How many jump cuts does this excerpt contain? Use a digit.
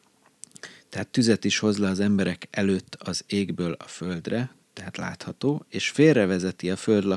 1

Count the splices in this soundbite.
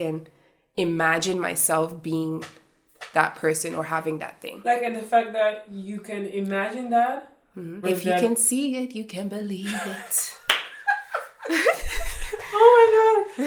1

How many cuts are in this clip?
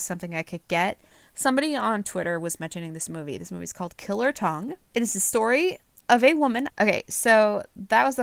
2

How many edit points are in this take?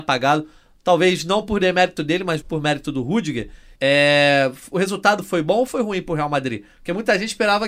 2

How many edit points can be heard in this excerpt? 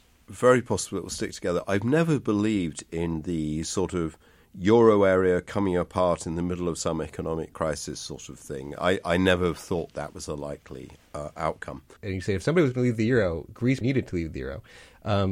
2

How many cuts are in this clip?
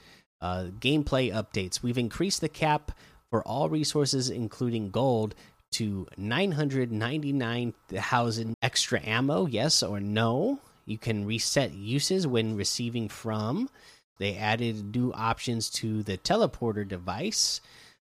2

